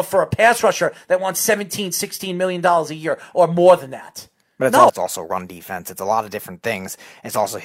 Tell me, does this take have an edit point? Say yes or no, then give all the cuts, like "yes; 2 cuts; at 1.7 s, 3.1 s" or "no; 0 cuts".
yes; 1 cut; at 4.9 s